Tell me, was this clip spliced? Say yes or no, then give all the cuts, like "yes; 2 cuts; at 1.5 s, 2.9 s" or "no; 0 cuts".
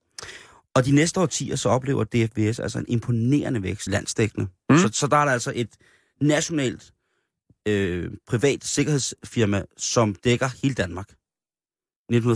yes; 1 cut; at 3.9 s